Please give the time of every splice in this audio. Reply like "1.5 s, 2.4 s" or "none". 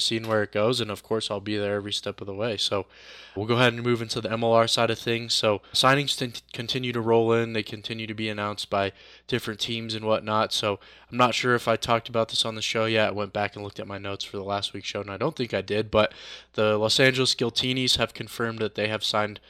3.4 s, 5.7 s